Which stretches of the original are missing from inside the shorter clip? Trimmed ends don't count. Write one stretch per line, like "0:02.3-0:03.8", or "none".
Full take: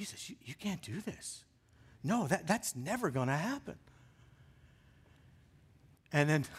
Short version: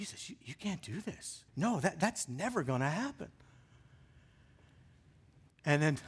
0:01.5-0:02.0